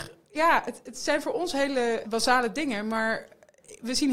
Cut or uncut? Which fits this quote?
cut